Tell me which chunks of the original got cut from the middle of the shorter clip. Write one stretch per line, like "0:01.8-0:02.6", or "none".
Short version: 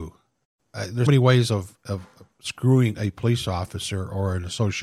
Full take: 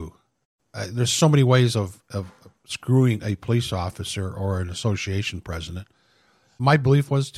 0:01.1-0:01.3